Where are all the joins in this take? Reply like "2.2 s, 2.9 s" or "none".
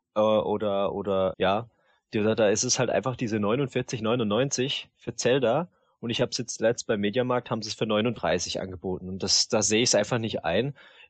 1.3 s

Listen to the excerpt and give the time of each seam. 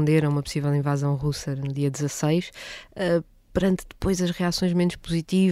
none

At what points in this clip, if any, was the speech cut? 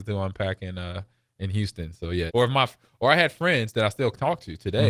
2.3 s

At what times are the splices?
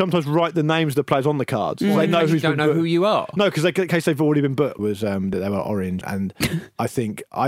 4.8 s, 6.0 s

